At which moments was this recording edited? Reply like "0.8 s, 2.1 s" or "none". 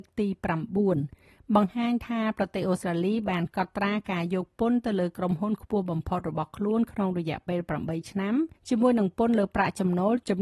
8.6 s